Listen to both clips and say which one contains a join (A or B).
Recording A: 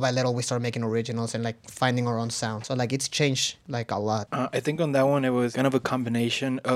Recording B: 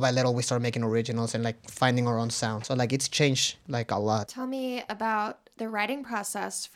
A